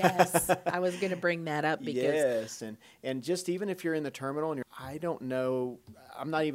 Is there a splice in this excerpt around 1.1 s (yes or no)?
no